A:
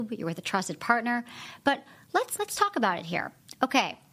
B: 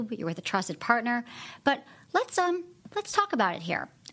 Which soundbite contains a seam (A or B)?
A